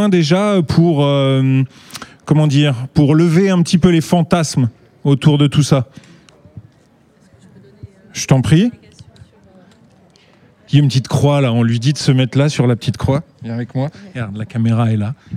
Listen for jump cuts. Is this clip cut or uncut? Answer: uncut